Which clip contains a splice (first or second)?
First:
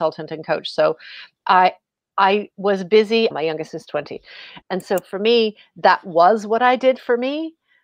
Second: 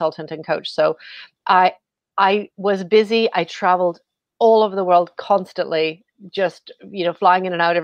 first